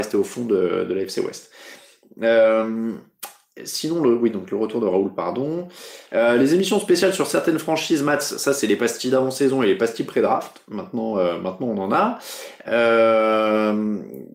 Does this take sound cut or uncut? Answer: cut